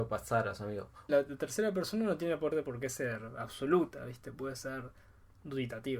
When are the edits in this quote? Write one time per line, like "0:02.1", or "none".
0:01.1